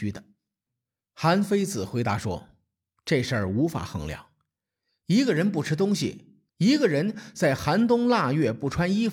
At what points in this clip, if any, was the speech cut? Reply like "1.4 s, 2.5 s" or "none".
6.5 s